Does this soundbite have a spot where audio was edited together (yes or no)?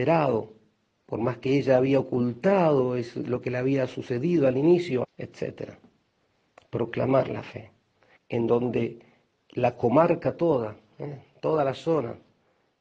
yes